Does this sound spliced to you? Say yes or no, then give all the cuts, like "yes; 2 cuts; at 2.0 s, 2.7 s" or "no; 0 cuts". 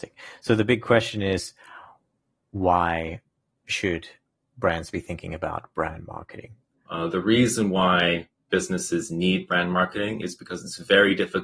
yes; 1 cut; at 6.9 s